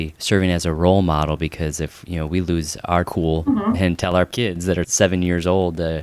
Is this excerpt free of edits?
yes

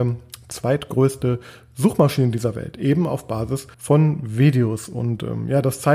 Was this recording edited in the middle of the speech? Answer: yes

